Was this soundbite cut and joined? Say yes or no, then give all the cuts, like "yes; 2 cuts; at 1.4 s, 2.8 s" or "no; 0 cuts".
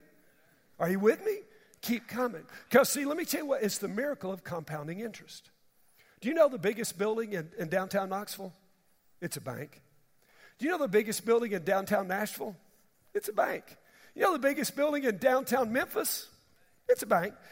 no; 0 cuts